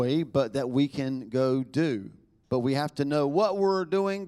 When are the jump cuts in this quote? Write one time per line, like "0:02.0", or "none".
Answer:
none